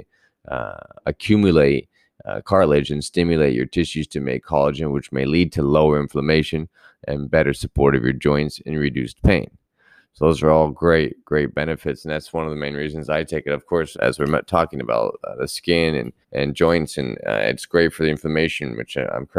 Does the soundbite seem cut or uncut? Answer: cut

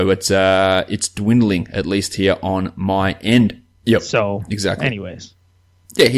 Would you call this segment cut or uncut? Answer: cut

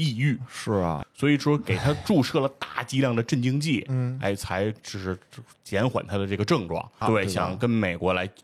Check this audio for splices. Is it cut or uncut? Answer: cut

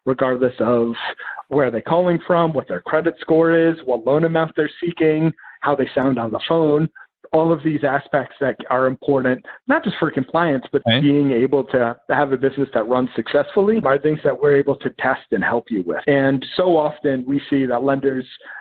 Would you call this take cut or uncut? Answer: cut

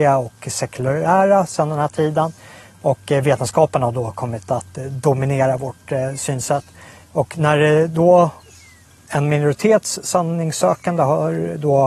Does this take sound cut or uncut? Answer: uncut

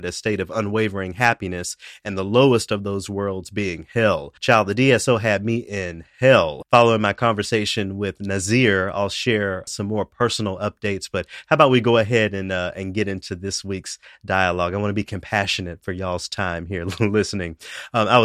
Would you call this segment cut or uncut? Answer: cut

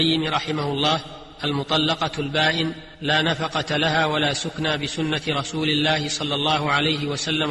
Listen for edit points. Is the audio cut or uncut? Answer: cut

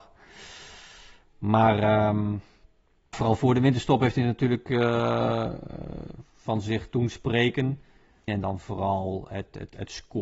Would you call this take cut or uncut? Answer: cut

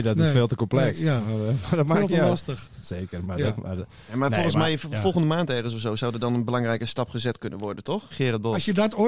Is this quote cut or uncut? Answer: cut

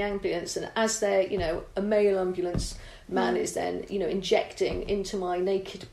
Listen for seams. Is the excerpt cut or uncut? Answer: uncut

